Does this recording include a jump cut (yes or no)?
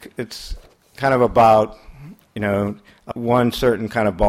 yes